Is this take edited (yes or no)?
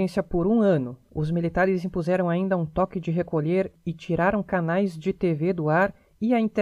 yes